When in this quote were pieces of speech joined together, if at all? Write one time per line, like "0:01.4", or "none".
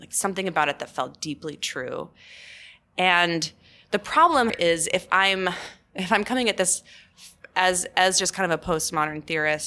0:04.5